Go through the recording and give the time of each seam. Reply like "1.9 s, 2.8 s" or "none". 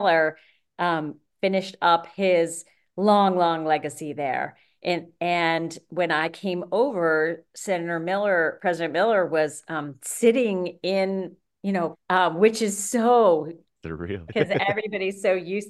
11.9 s, 14.3 s